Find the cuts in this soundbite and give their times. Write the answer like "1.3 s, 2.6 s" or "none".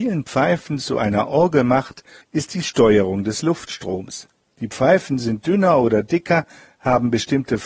2.2 s, 4.4 s